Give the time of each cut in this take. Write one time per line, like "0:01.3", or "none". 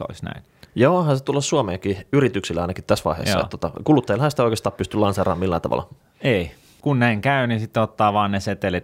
none